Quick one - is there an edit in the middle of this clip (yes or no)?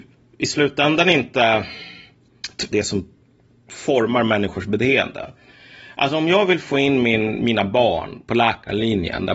yes